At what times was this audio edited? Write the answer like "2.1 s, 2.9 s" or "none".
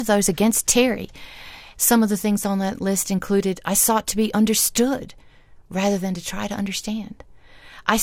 1.7 s